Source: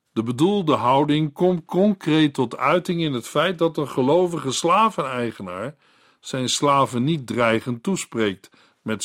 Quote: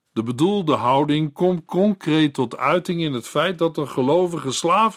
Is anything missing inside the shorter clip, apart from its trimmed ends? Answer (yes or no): no